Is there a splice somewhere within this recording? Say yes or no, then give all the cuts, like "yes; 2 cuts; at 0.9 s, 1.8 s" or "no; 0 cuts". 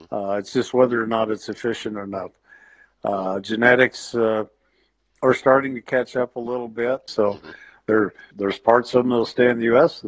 yes; 2 cuts; at 7.1 s, 8.3 s